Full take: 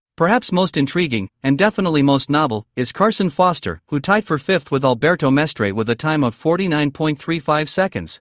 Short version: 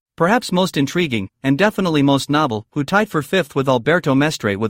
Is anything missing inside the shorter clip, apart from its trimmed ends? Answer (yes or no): yes